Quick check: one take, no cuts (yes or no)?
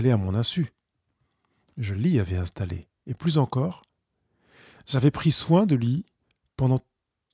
yes